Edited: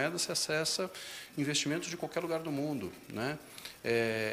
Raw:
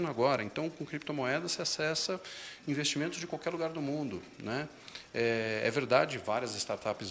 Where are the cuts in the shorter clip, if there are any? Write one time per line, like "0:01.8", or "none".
none

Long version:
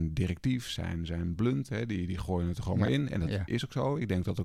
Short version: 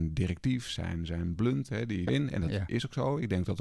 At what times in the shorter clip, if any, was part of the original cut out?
0:02.1

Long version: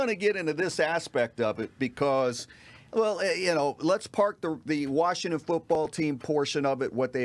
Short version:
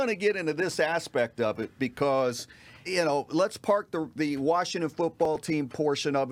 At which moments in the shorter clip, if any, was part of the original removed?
0:02.9

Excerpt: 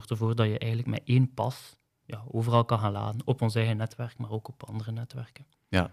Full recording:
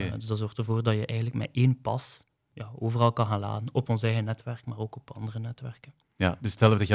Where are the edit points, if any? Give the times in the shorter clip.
none

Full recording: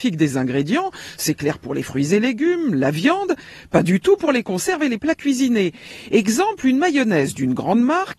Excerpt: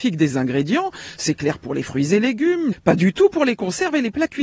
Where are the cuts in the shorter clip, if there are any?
0:02.7

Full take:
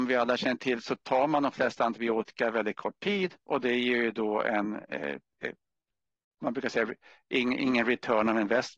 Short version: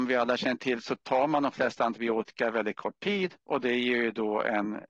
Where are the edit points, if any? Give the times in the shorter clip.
none

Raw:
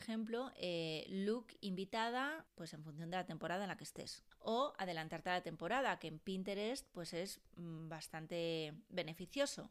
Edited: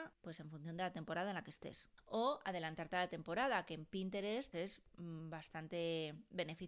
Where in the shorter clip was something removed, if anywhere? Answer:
0:04.5

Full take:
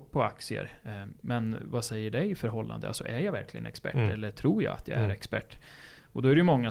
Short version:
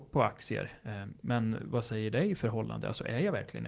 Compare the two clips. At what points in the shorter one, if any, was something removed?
none

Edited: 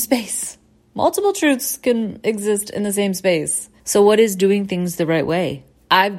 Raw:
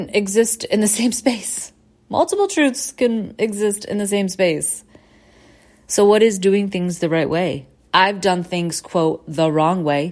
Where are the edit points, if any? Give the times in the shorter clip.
0:03.8

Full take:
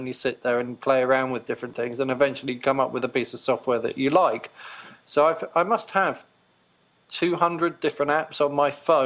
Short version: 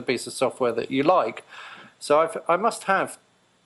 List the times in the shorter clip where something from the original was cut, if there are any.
none

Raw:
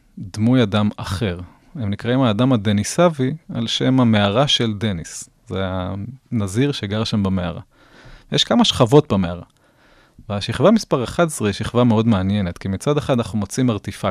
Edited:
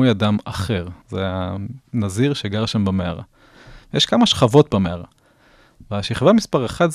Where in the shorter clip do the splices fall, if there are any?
0:01.0

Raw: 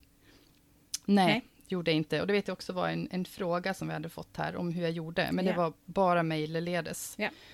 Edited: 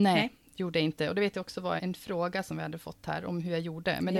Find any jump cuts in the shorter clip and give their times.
0:01.8

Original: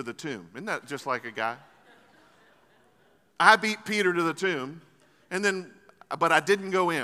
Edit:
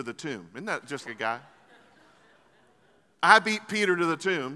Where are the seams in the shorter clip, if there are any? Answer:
0:01.0

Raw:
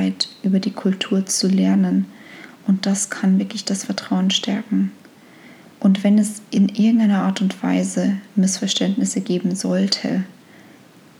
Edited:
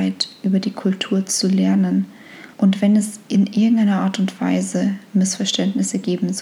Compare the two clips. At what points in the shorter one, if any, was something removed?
0:02.5

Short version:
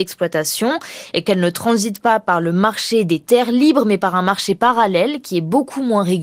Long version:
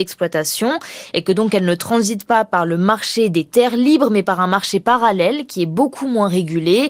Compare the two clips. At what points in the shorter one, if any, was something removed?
0:01.3

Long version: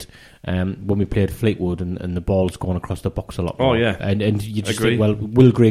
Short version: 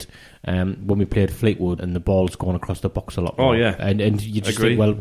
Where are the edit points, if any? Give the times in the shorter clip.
0:01.8

